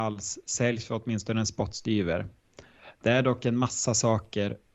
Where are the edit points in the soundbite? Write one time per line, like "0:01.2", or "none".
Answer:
none